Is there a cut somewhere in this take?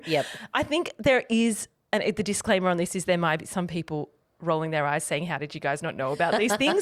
no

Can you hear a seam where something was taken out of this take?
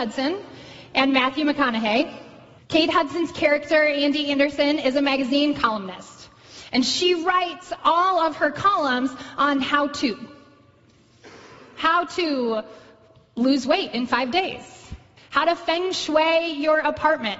yes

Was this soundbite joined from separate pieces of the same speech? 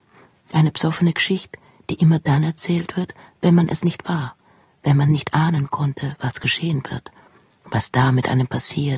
no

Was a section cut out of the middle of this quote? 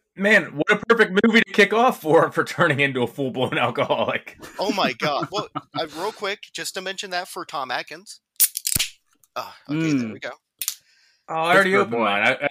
no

